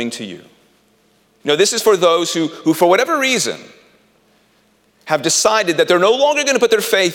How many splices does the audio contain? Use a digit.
1